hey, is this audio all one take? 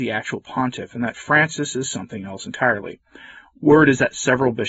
yes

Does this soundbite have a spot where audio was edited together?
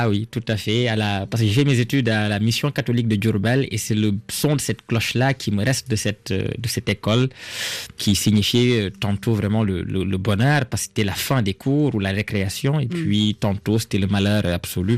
no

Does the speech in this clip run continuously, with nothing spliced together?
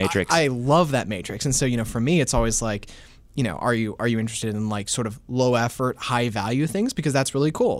yes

